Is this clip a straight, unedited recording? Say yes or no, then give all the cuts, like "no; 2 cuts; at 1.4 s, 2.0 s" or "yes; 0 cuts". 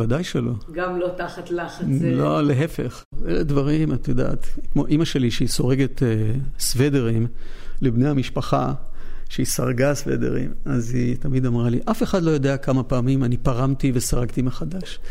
yes; 0 cuts